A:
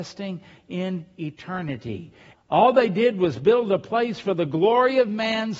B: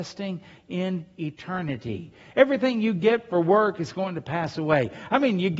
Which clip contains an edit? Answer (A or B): A